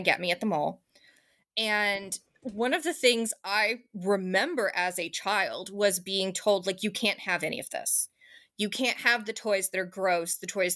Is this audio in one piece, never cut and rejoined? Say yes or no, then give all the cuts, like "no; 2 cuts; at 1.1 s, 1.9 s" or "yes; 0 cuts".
yes; 0 cuts